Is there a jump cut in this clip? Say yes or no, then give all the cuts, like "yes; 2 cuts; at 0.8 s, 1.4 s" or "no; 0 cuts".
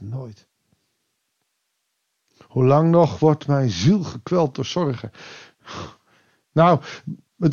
no; 0 cuts